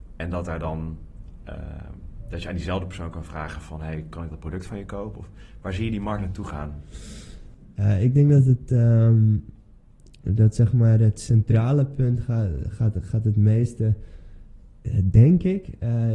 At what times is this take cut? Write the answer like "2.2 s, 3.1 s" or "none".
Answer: none